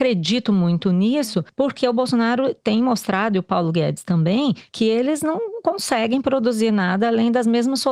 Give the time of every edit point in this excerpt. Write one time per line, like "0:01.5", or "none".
none